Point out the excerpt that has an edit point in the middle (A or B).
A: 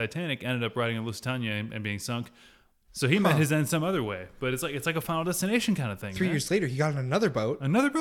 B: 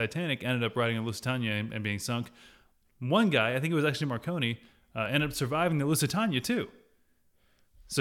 A